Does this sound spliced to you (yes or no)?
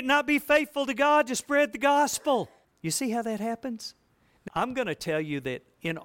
yes